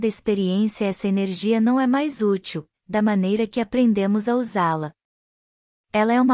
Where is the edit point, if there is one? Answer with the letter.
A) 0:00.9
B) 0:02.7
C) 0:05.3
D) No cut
B